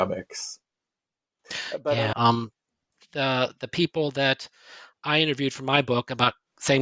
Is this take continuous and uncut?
no; 1 cut; at 2.1 s

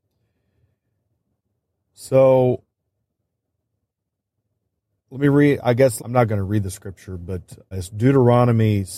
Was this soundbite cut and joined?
yes; 2 cuts; at 6.0 s, 7.7 s

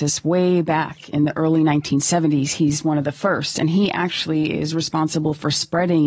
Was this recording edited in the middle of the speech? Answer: no; 0 cuts

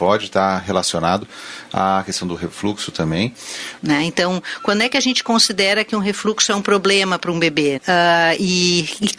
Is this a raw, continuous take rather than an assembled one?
no; 2 cuts; at 3.8 s, 7.8 s

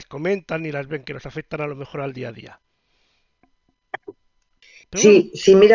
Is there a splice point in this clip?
no; 0 cuts

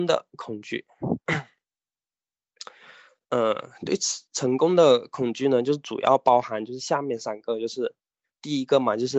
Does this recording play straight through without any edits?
yes; 0 cuts

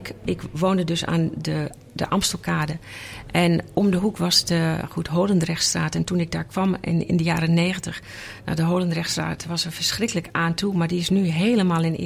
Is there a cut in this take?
no; 0 cuts

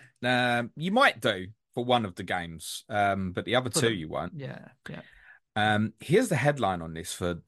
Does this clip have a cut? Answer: no; 0 cuts

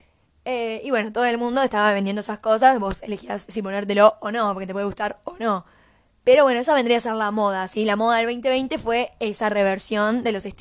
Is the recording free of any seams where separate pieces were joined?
yes; 0 cuts

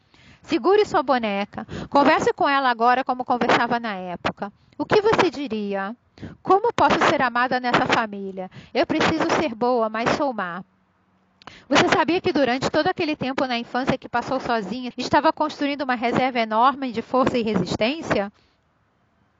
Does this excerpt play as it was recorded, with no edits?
no; 1 cut; at 14.9 s

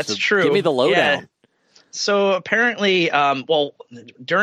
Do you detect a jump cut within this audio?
no; 0 cuts

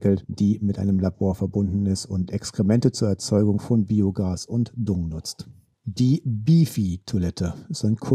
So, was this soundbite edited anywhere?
no; 0 cuts

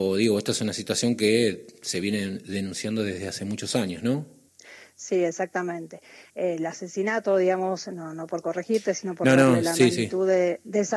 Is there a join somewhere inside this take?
no; 0 cuts

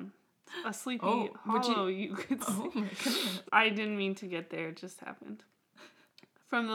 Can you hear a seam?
yes; 1 cut; at 3.5 s

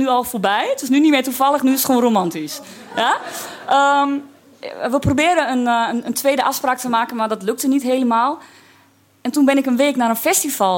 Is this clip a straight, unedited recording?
yes; 0 cuts

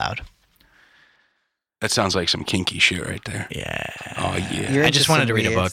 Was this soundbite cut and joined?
no; 0 cuts

